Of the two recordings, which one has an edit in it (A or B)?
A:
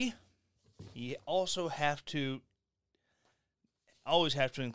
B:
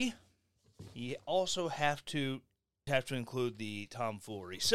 B